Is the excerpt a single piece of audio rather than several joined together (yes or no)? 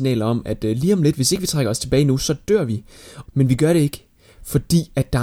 no